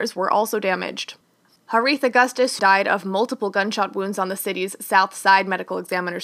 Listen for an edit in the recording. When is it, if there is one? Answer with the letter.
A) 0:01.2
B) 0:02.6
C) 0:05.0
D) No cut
B